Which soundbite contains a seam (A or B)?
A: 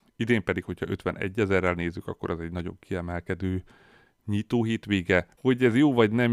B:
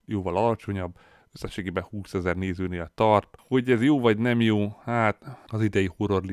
A